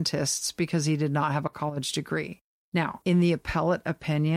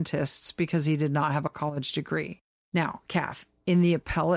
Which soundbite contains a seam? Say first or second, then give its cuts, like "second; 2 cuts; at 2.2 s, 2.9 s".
first; 1 cut; at 3.0 s